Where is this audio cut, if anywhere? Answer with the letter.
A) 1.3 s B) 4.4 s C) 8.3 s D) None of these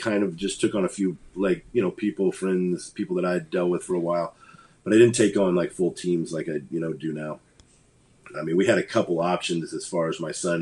C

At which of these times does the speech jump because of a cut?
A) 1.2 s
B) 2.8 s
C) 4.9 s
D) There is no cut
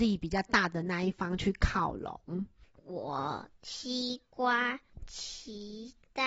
B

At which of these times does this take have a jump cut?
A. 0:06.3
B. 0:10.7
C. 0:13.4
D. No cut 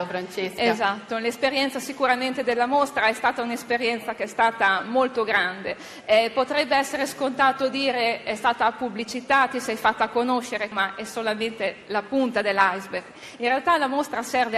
B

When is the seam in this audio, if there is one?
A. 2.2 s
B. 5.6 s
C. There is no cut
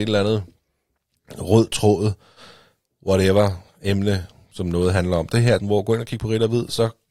B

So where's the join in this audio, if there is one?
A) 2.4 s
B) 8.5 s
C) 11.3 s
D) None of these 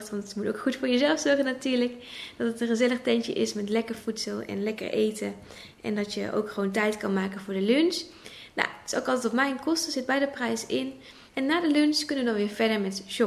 C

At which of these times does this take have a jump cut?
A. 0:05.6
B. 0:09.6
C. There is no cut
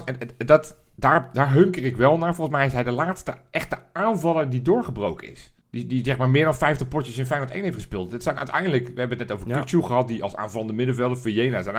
A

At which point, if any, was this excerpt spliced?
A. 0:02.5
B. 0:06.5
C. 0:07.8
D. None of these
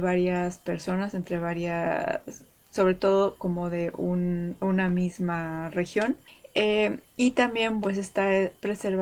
C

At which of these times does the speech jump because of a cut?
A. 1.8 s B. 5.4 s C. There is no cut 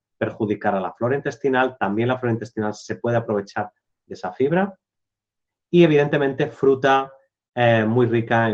C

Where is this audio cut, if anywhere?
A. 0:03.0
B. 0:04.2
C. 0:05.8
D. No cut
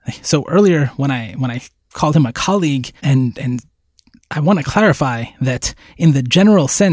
A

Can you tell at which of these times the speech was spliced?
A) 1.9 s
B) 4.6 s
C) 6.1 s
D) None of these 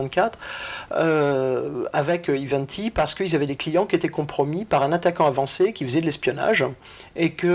D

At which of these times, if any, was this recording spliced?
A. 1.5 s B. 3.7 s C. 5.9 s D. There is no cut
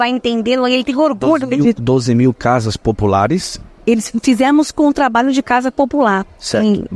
D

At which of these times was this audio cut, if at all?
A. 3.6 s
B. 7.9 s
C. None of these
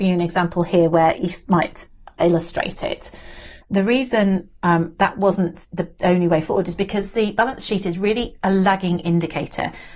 A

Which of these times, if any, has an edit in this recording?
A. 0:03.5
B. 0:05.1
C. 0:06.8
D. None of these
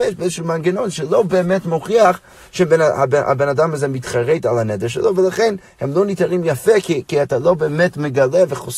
D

